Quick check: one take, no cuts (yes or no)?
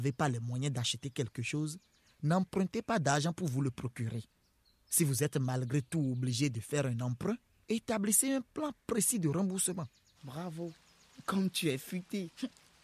no